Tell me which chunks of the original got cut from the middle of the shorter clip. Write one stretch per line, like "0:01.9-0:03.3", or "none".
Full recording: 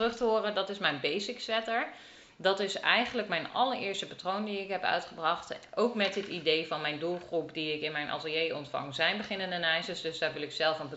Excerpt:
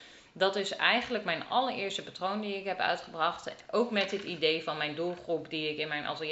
none